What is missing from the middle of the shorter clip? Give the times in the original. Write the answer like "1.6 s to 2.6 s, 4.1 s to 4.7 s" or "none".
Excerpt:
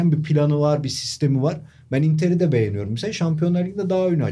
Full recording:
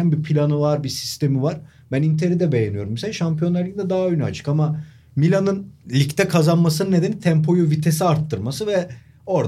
none